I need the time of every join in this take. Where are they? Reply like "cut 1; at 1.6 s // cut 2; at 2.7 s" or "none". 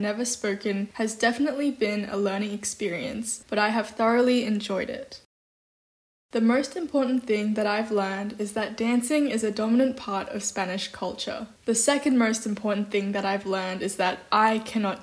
none

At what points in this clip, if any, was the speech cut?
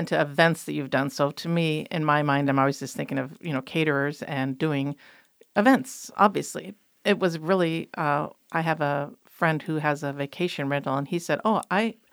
none

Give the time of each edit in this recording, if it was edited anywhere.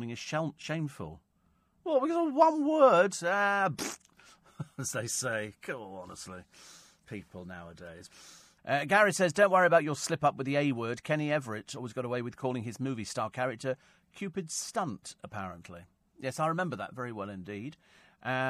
none

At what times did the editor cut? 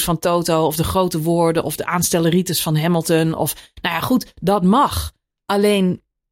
none

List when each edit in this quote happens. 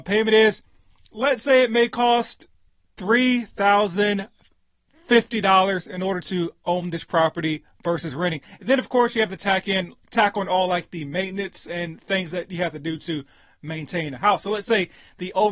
none

